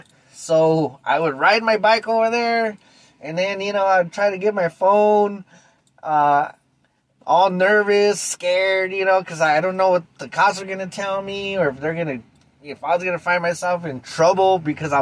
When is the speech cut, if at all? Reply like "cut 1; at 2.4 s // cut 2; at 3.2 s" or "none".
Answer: cut 1; at 7.2 s